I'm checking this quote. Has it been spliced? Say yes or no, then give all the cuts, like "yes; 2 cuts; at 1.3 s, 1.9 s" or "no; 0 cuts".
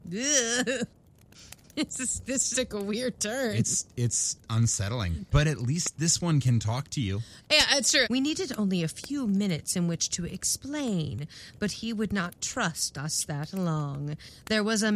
yes; 2 cuts; at 2.5 s, 8.0 s